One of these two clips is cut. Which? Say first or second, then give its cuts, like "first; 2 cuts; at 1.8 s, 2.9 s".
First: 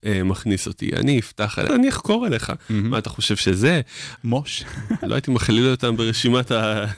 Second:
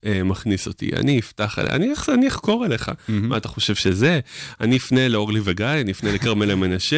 first; 2 cuts; at 1.7 s, 4.2 s